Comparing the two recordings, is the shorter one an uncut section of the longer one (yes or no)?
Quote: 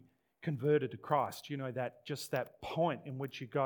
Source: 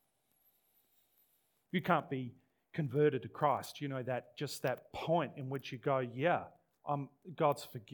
yes